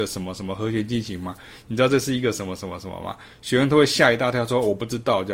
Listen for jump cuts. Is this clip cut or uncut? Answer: uncut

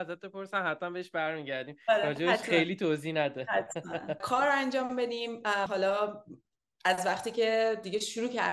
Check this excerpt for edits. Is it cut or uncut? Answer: cut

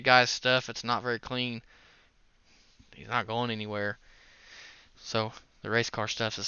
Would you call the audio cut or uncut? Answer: uncut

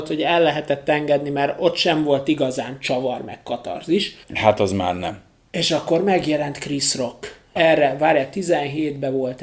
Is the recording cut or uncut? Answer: cut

